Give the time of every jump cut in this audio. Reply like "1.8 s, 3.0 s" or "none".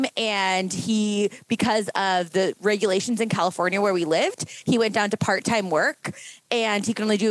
none